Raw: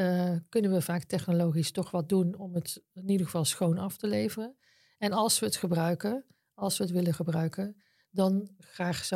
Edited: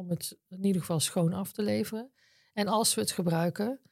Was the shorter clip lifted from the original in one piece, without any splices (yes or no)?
yes